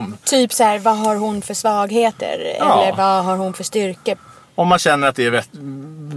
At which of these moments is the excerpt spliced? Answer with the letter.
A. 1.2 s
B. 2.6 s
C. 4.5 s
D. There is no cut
D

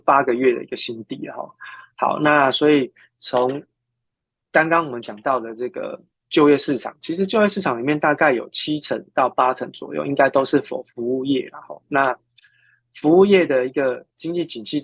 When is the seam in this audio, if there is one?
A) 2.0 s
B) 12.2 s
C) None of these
C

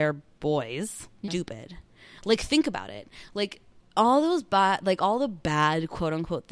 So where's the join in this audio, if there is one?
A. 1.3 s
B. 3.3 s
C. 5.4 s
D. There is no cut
A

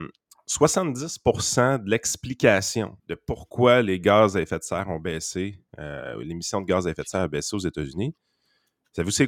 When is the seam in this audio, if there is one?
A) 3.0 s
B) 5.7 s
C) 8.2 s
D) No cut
A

